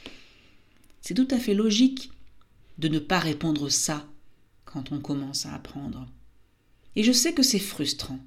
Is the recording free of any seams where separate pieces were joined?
yes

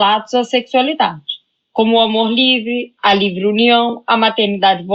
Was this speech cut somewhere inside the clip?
no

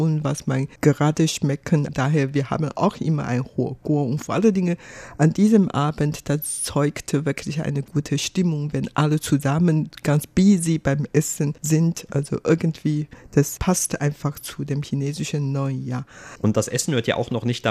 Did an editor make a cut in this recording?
no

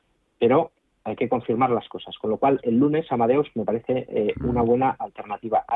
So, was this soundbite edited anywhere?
no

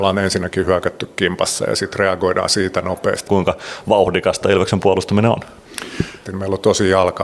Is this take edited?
yes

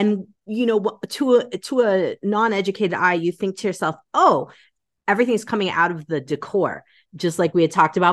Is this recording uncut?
yes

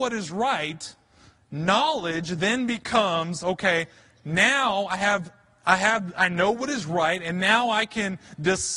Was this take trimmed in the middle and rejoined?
no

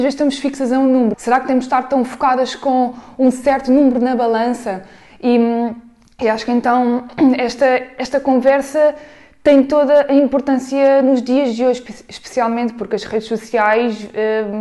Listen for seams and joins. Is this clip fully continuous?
no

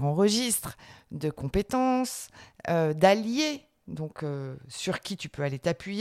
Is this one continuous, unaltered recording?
yes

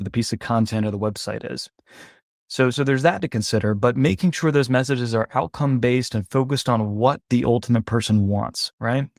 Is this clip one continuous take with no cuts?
yes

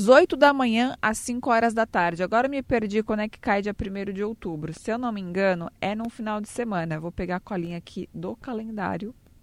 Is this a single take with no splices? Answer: yes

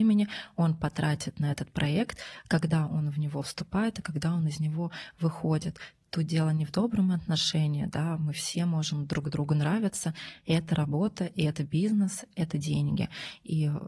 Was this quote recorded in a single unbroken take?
yes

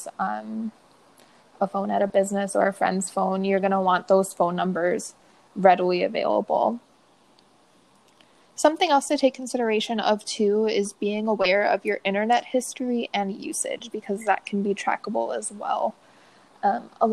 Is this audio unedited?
yes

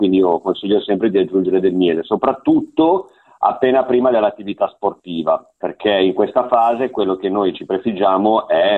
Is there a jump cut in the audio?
yes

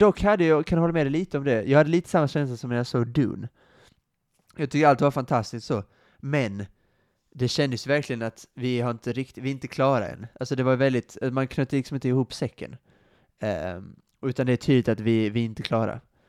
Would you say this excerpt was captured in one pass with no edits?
yes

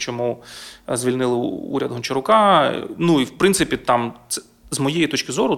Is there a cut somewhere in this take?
no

